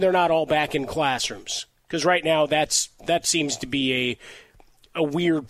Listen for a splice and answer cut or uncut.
uncut